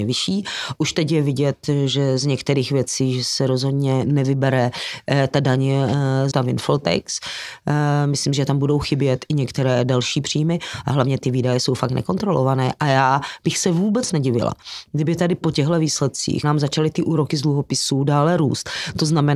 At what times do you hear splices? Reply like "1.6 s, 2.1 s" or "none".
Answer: 6.3 s, 16.4 s